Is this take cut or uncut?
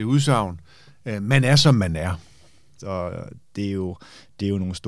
cut